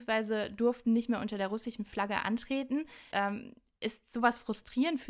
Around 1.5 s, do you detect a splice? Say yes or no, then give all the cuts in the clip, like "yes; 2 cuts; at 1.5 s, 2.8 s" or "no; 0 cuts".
no; 1 cut; at 3.1 s